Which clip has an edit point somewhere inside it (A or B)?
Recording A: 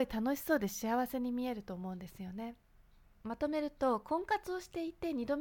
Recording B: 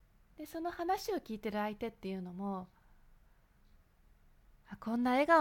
A